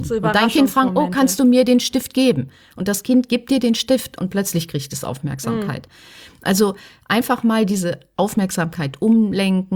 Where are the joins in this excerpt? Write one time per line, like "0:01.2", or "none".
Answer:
none

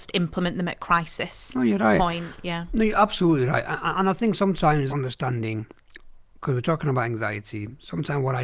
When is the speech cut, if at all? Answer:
0:04.9

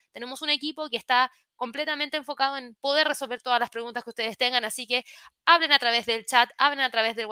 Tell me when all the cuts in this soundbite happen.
none

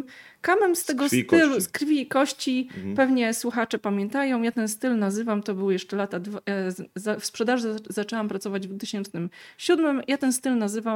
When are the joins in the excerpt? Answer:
none

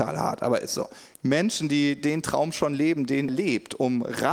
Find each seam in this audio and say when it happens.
0:01.1
0:03.3

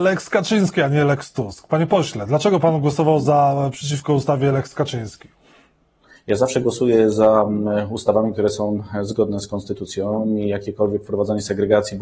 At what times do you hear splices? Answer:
none

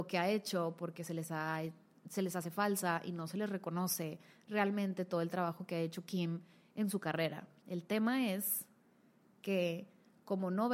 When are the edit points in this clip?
0:07.6

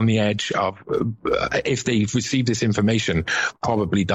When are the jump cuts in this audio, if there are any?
none

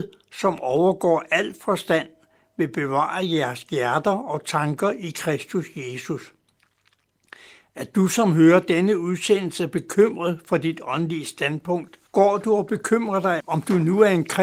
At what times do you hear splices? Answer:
0:12.1
0:13.4

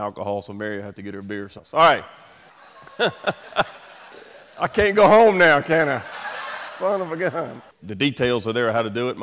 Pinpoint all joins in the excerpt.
0:07.8

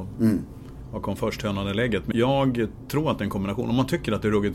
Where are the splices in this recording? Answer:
0:02.1

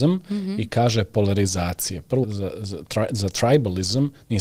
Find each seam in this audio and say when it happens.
0:02.2

